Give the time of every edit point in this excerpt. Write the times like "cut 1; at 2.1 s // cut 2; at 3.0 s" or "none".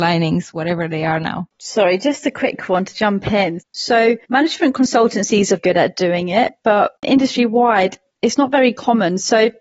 cut 1; at 1.5 s // cut 2; at 3.6 s // cut 3; at 5.6 s